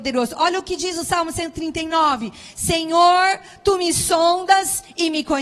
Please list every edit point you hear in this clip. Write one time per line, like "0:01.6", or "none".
none